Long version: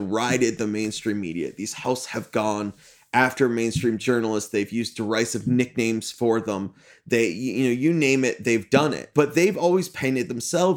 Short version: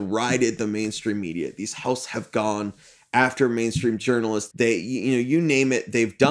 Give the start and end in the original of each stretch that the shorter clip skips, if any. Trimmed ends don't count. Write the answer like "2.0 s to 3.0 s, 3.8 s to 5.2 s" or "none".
4.5 s to 7.0 s